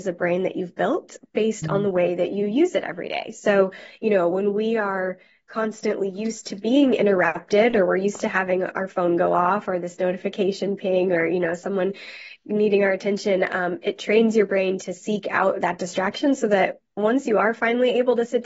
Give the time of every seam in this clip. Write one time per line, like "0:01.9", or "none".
none